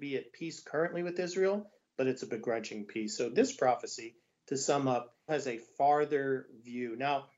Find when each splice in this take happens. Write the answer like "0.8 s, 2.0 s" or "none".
3.2 s, 5.3 s